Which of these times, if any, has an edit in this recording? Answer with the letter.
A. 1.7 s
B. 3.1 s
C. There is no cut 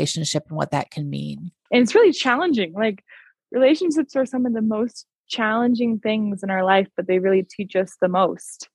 A